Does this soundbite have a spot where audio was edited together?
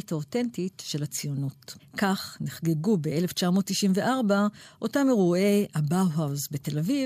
yes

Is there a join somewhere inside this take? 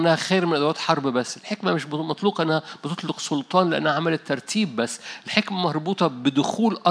yes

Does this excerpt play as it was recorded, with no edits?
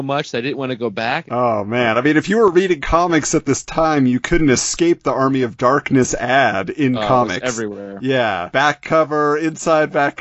no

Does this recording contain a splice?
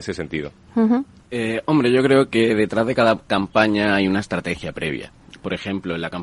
yes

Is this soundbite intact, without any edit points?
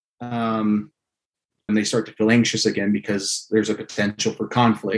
no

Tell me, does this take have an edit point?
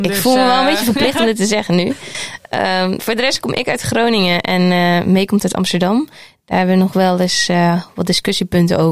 no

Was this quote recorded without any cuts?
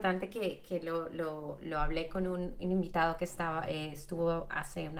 yes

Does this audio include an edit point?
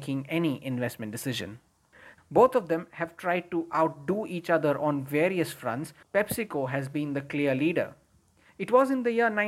yes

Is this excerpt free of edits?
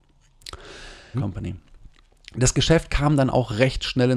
no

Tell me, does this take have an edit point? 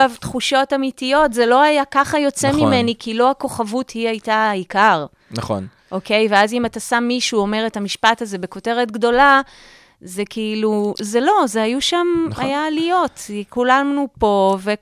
no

